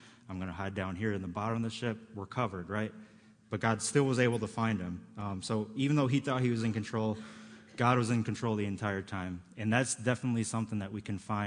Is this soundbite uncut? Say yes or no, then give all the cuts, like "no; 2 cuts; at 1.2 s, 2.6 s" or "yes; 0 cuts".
yes; 0 cuts